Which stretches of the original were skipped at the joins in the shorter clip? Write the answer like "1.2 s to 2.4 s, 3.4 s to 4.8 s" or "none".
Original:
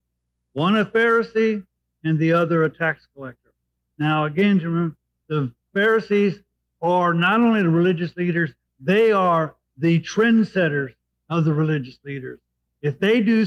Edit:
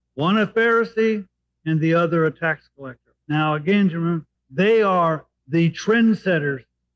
3.6 s to 3.9 s, 5.0 s to 8.6 s